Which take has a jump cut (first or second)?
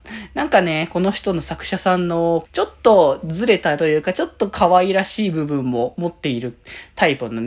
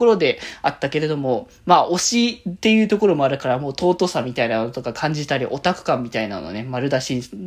first